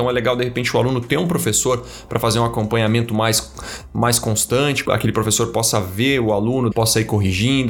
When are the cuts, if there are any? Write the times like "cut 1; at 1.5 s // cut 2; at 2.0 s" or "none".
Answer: cut 1; at 4.9 s // cut 2; at 6.7 s